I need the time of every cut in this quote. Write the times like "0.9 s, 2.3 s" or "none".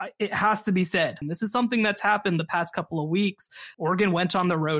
1.2 s, 3.7 s